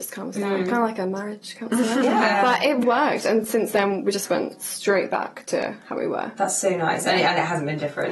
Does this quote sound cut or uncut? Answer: cut